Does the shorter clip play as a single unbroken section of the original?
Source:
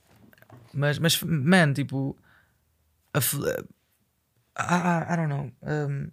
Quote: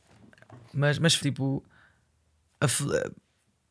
no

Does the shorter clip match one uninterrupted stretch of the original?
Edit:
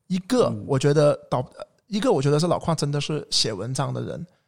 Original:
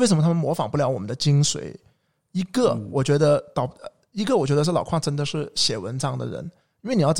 yes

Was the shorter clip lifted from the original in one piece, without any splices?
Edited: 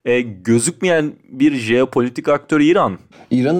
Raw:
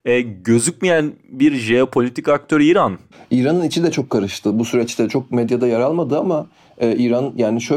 yes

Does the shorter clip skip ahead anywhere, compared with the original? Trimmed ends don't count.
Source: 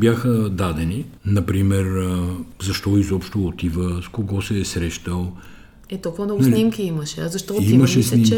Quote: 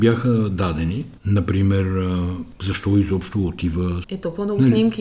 yes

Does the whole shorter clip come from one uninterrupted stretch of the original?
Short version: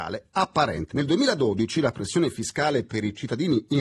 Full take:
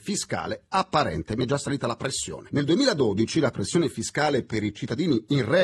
no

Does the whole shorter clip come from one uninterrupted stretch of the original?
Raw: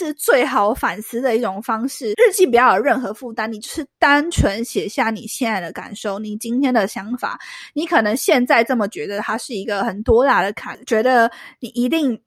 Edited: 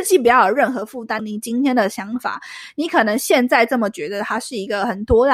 no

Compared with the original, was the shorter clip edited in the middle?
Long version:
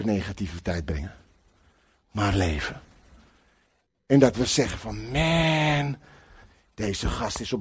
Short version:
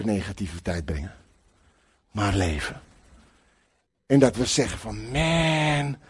no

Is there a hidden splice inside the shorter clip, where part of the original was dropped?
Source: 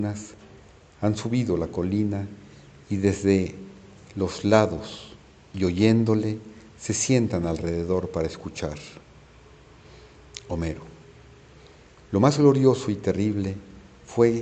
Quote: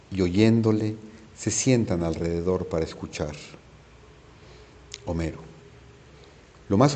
no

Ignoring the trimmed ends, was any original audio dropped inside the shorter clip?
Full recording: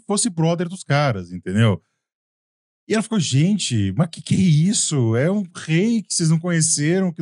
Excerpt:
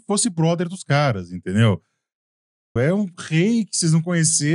yes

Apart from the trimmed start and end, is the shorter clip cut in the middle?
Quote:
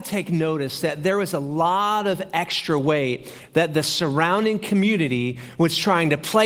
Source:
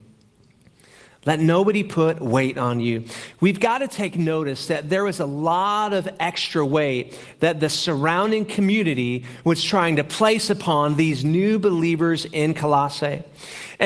no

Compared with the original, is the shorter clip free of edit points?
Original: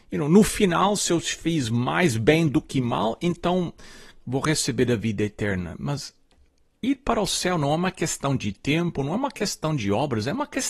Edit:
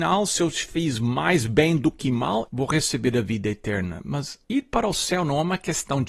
no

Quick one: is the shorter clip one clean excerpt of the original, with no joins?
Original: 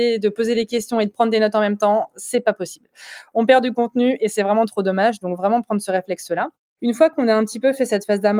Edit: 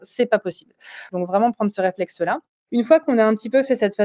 no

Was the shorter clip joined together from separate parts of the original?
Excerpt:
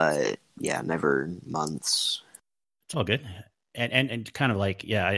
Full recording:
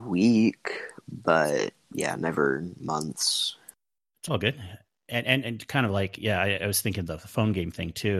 no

